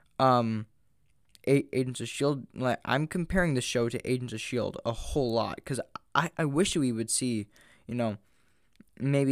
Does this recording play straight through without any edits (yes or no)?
no